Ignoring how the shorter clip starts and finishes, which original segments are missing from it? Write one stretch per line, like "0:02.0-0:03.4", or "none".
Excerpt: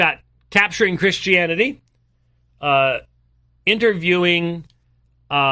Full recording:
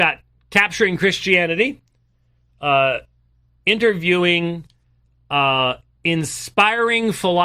none

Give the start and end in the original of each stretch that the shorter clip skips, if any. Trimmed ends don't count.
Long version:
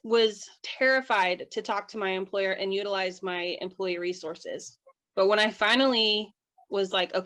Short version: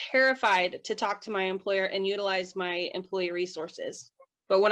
none

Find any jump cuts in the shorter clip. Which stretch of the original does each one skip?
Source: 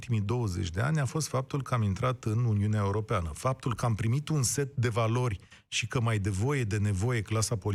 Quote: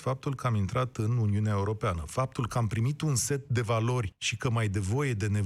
0:05.4-0:05.6

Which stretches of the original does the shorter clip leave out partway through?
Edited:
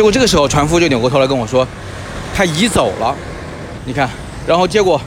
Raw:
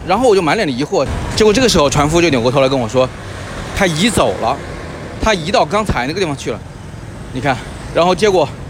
0:05.2-0:07.3

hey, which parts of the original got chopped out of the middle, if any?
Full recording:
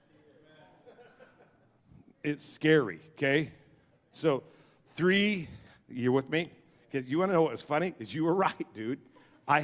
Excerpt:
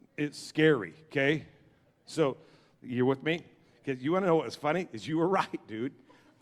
0:04.8-0:05.8

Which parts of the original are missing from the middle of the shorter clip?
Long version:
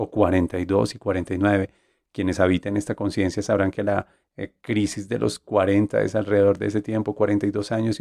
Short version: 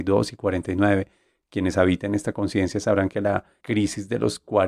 0:04.2-0:04.6

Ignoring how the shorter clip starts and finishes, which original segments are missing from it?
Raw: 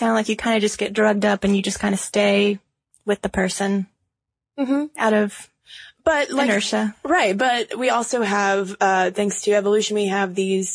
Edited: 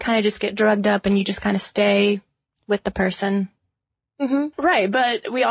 0:04.9-0:07.0

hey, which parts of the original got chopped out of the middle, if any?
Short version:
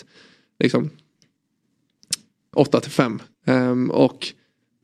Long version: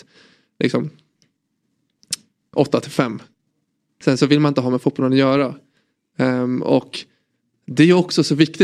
0:03.4-0:06.1

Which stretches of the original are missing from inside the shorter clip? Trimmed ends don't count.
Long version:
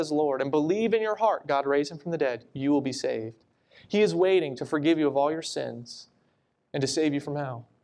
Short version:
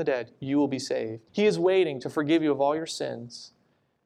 0:03.4-0:03.8

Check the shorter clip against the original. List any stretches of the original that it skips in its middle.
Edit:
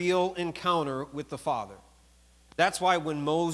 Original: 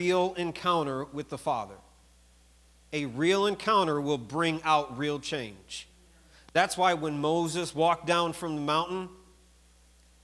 0:02.5-0:06.5

